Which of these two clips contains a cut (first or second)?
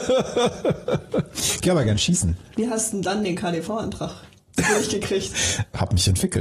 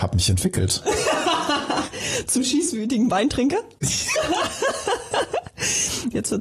second